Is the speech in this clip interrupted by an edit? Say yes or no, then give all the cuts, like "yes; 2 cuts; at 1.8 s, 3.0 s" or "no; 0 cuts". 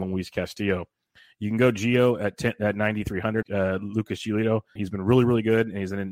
yes; 2 cuts; at 3.4 s, 4.8 s